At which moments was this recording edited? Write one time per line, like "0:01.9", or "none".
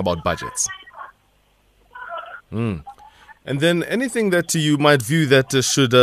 0:02.4